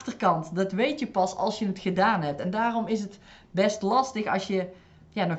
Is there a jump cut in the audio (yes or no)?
no